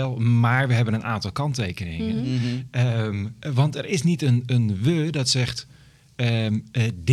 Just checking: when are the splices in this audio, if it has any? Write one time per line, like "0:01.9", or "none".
none